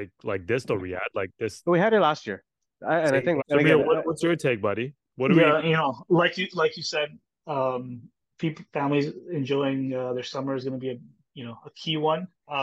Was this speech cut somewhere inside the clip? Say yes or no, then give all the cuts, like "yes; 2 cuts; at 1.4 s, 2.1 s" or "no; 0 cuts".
yes; 2 cuts; at 3.4 s, 5.0 s